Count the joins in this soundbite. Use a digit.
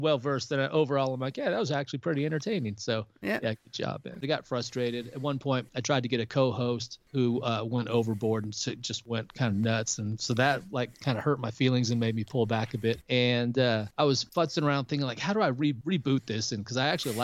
1